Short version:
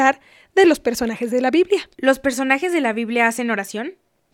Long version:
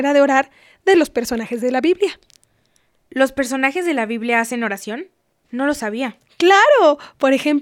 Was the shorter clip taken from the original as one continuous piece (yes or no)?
no